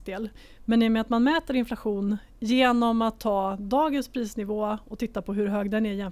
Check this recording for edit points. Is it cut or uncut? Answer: uncut